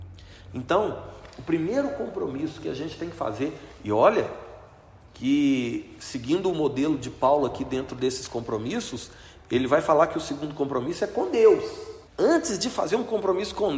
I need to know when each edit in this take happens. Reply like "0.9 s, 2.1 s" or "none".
12.1 s